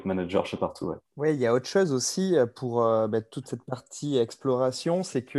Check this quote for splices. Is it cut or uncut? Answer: cut